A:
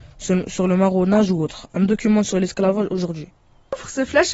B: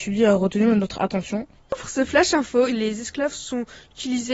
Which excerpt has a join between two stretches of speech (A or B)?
B